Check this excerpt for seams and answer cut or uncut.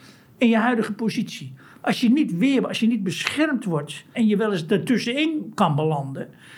cut